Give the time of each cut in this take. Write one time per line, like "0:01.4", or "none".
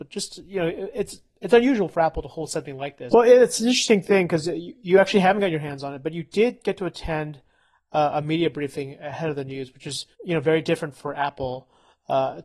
0:03.1
0:10.1

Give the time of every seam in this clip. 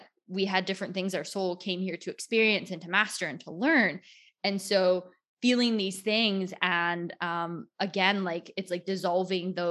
none

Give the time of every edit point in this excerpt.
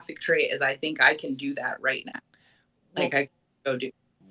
none

